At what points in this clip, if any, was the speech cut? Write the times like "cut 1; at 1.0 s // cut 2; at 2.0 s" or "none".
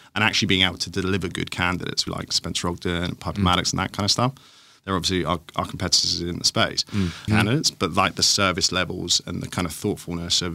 cut 1; at 2.1 s // cut 2; at 7.3 s